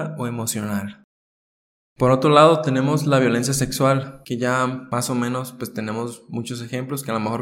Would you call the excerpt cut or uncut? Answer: uncut